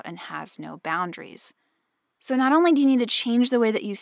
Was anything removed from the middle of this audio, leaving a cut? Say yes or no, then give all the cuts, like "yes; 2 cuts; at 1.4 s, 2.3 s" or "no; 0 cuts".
yes; 1 cut; at 2.1 s